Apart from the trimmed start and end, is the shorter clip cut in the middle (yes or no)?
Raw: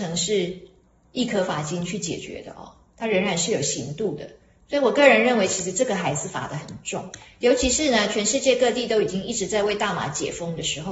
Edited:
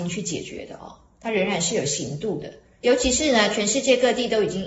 yes